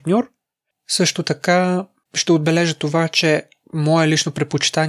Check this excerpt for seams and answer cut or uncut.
uncut